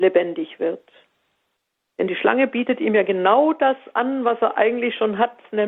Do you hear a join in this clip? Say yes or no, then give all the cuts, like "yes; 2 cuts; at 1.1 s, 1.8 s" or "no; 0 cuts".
yes; 1 cut; at 1.9 s